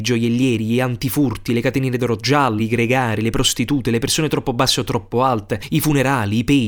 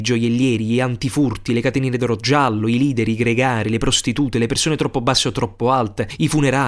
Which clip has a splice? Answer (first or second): first